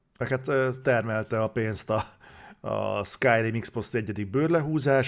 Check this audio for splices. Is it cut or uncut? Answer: uncut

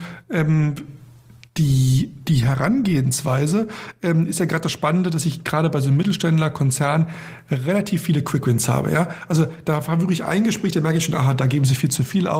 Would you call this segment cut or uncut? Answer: uncut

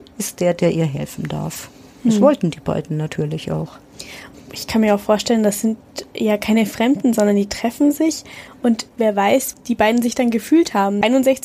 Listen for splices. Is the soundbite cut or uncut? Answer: cut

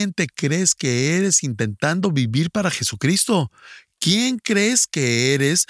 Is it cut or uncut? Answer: uncut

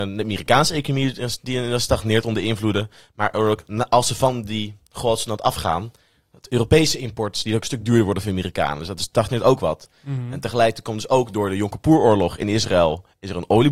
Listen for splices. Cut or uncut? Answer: uncut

